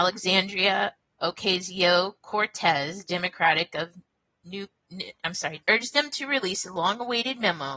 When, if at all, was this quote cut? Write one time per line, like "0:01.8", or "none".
0:05.6